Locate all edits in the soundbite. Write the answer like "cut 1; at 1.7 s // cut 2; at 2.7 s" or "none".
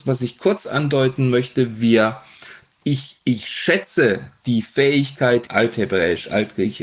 cut 1; at 5.5 s